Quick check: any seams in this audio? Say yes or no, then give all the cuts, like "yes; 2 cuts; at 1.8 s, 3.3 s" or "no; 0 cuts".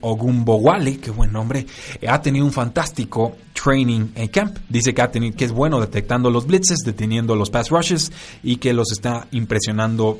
yes; 1 cut; at 5.4 s